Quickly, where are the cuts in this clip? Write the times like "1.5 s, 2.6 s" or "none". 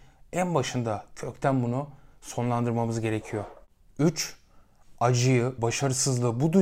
5.6 s